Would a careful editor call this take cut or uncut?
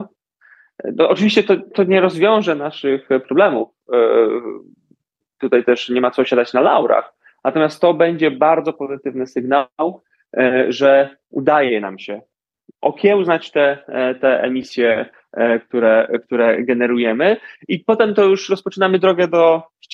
uncut